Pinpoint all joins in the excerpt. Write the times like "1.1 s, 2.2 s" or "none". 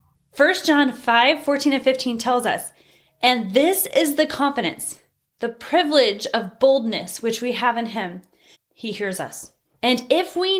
8.5 s